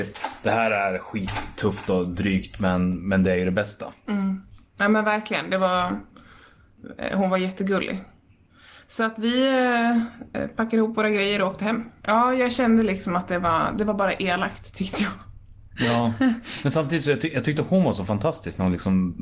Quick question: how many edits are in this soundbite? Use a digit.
2